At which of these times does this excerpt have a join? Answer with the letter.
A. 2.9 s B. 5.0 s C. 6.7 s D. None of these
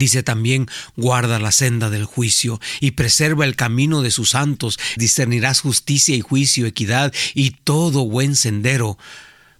B